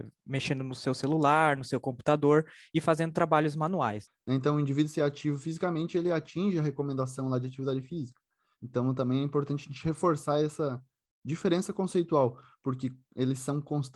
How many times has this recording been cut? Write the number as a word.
two